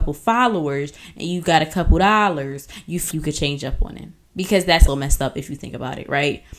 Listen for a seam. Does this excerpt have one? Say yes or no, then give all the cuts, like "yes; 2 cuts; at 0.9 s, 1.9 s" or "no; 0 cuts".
yes; 2 cuts; at 3.1 s, 4.9 s